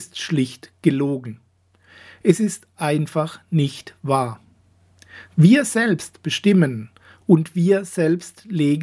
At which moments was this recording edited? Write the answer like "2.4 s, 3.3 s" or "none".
none